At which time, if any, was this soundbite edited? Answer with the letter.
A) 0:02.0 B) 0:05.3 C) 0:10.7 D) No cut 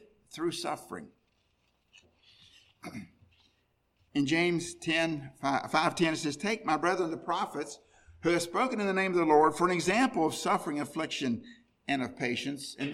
A